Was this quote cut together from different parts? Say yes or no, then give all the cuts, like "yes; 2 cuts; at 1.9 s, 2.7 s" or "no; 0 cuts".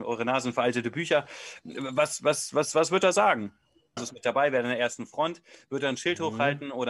yes; 1 cut; at 4.0 s